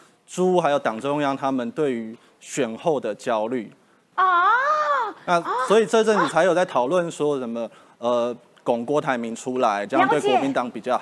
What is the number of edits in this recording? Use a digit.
1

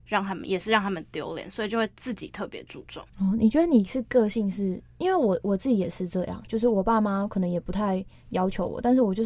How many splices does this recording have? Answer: 2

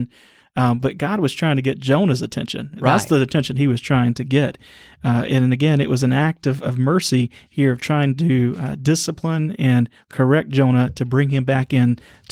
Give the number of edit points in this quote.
0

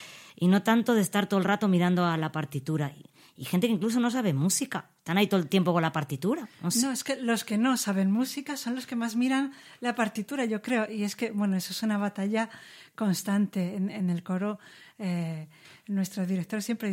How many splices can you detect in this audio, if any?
0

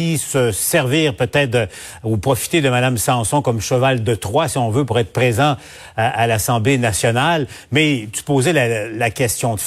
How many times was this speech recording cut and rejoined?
0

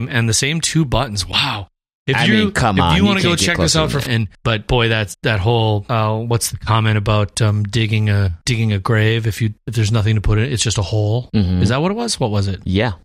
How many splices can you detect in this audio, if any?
1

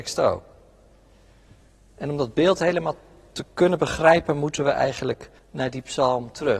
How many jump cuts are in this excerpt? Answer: 1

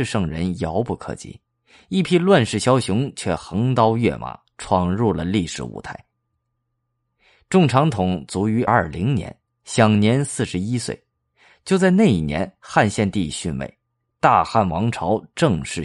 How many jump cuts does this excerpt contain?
1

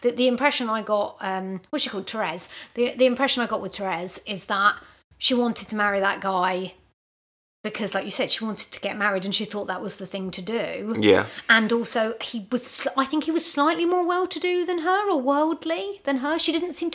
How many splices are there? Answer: 0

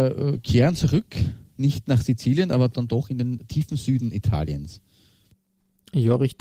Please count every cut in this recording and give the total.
0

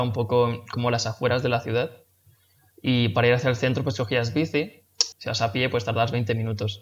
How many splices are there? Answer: 1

